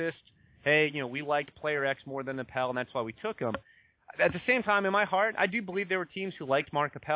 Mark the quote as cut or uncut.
uncut